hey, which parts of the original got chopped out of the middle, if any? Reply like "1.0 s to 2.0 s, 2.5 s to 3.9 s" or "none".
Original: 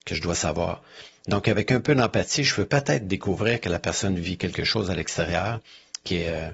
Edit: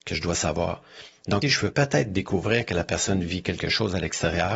1.4 s to 2.4 s

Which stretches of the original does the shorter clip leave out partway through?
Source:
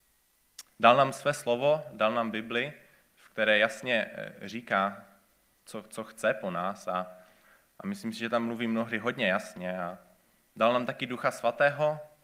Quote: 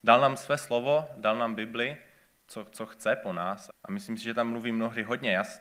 3.1 s to 5.5 s, 6.9 s to 7.6 s

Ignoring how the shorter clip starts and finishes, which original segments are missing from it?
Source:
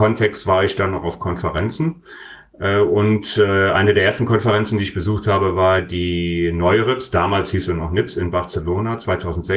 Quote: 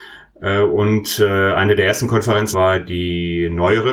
4.7 s to 5.5 s

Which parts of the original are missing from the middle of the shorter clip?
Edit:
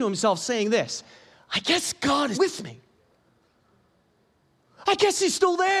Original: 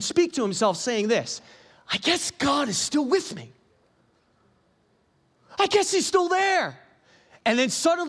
2.7 s to 3.1 s

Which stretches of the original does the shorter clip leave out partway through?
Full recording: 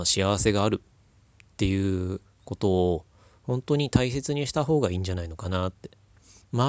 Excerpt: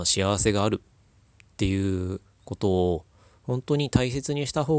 none

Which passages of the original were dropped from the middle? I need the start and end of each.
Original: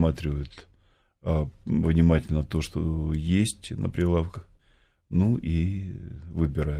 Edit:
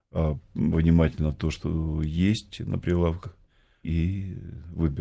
4.9 s to 5.4 s

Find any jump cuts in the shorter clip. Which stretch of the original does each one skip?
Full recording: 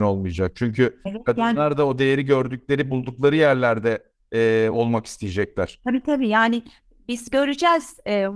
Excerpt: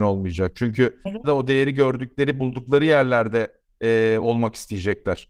1.2 s to 1.7 s

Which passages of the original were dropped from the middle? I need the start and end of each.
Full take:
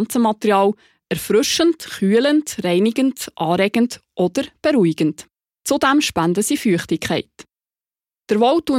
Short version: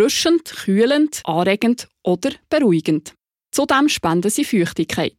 2.6 s to 3.3 s

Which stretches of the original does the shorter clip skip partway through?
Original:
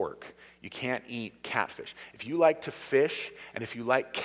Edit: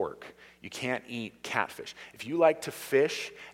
none

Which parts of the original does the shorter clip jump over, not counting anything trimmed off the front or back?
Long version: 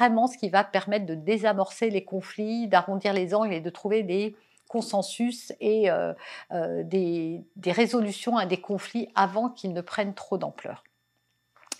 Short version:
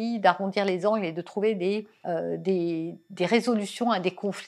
4.5 s to 6.5 s

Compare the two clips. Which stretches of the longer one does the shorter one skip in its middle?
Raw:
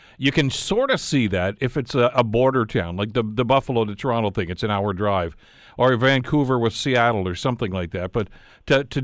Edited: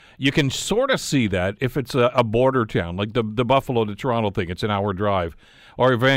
none

